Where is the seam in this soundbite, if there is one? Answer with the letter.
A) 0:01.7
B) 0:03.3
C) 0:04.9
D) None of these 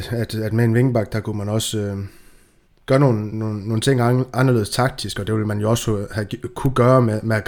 B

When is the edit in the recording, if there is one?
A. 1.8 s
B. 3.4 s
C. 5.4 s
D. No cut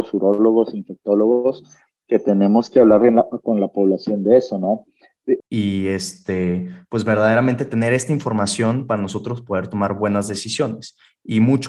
C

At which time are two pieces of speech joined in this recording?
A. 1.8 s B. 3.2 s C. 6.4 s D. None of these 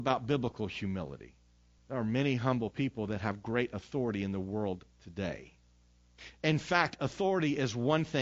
A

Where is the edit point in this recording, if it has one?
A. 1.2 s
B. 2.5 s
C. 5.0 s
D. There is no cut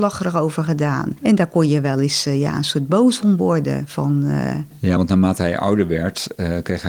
D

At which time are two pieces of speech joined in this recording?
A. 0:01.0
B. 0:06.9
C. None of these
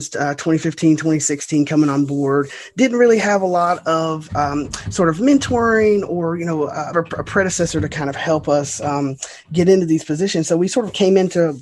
B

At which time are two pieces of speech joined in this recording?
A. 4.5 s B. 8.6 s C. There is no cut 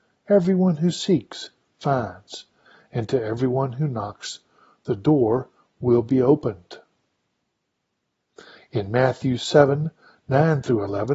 B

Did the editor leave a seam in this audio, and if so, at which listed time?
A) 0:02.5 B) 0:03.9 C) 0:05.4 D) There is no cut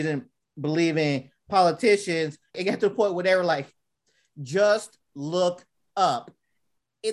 A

